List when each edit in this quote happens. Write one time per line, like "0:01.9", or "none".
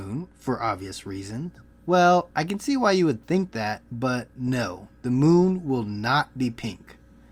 0:01.7